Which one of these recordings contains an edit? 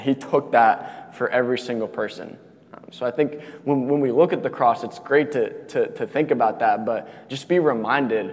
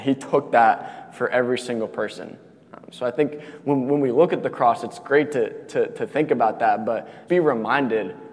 second; 1 cut; at 7.3 s

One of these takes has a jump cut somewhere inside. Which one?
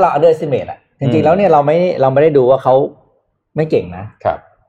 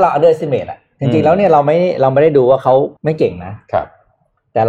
second; 1 cut; at 3.0 s

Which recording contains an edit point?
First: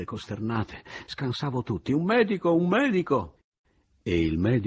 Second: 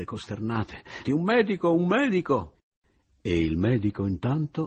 second; 1 cut; at 1.0 s

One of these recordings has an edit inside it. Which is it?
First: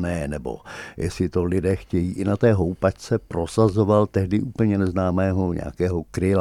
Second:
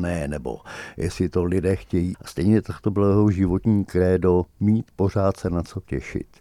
second; 1 cut; at 2.1 s

